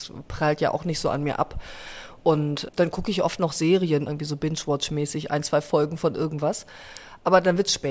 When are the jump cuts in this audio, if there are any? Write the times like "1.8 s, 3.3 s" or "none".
2.7 s, 4.1 s